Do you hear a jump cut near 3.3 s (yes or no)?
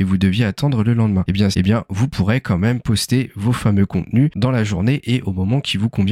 no